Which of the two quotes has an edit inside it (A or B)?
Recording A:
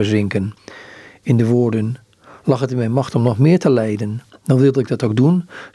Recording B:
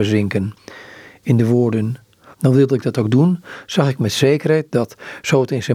B